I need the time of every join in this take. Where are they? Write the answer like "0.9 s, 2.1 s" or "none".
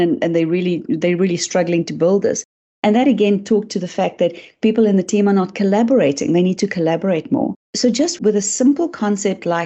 none